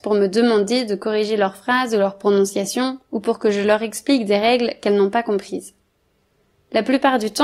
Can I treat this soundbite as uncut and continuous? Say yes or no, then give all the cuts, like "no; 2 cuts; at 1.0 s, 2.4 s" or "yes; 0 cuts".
yes; 0 cuts